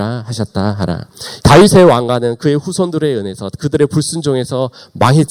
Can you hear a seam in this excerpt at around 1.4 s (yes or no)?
yes